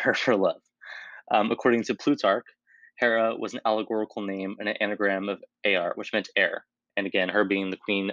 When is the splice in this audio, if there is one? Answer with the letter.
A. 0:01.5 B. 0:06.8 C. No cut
C